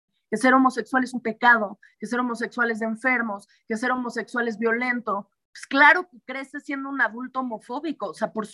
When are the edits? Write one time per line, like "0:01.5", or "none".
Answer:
none